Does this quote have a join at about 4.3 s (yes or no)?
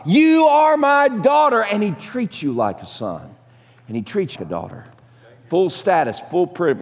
yes